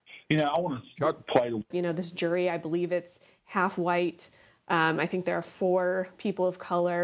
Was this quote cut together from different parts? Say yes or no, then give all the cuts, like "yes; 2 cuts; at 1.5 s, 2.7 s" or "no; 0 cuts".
yes; 1 cut; at 1.7 s